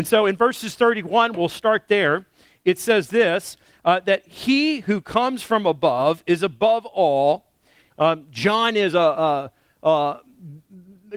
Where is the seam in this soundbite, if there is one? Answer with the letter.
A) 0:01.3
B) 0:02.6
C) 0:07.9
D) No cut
C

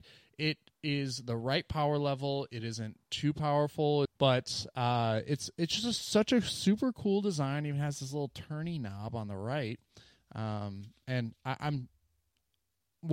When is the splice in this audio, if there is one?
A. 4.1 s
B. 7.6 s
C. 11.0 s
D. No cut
A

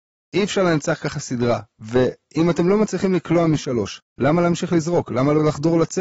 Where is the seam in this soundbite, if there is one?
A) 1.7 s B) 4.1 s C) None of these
B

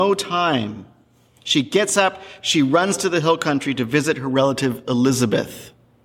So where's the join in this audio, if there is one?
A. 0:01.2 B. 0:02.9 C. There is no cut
C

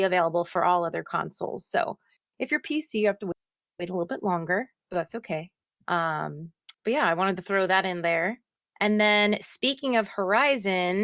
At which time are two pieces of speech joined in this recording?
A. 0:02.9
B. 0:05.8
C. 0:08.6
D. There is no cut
D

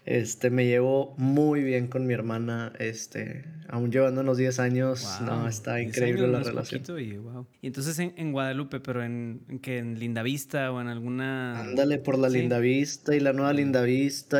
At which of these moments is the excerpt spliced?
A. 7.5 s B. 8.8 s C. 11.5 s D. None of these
A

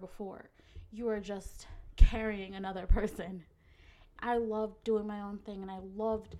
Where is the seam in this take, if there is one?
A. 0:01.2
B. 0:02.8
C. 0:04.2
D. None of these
C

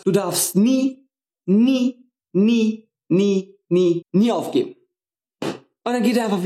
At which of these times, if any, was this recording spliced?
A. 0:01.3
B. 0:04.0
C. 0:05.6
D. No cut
B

